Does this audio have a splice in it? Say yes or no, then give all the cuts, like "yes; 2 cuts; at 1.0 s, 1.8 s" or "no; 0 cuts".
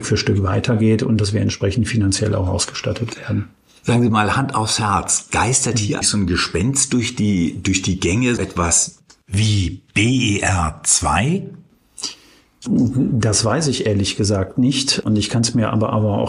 yes; 2 cuts; at 6.0 s, 8.4 s